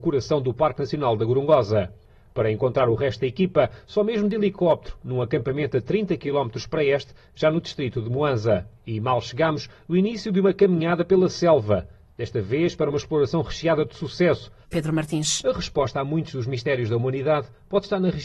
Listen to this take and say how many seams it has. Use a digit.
2